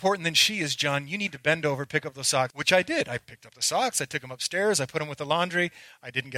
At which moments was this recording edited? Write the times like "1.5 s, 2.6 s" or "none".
2.5 s

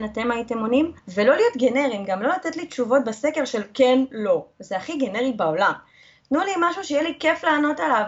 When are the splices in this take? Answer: 1.0 s

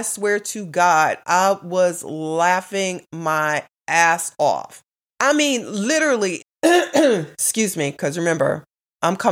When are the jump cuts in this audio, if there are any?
5.1 s, 6.4 s

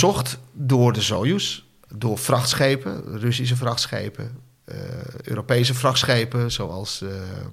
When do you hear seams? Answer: none

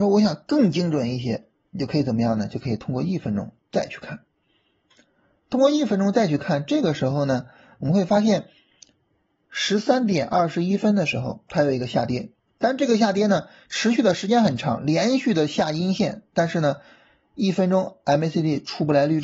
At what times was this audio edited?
none

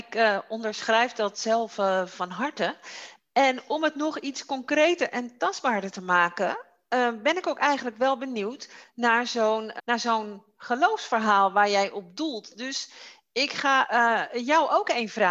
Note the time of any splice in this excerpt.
9.8 s

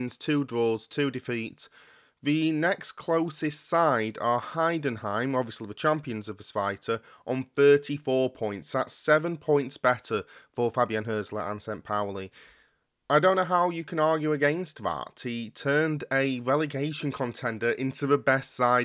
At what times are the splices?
none

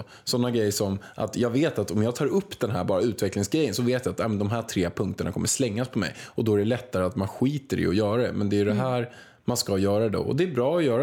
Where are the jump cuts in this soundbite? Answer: none

